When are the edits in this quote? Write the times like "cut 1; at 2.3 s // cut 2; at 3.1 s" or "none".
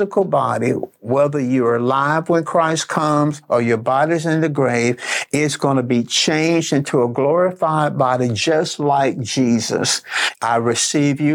cut 1; at 10.3 s